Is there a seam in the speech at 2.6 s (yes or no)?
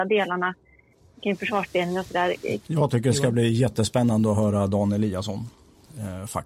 yes